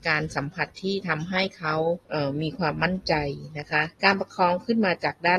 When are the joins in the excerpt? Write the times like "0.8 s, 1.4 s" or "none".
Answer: 2.0 s, 3.9 s